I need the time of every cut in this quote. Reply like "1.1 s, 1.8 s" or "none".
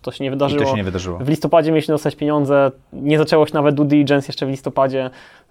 none